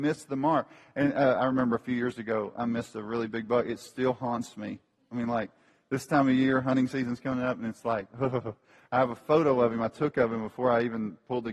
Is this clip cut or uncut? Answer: uncut